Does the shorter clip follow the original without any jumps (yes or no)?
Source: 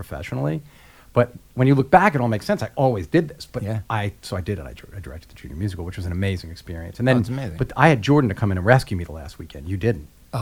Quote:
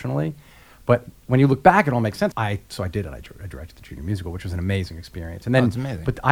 no